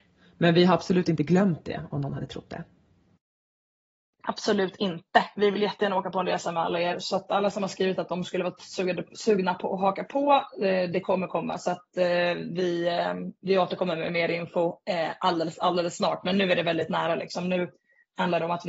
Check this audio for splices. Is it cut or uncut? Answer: uncut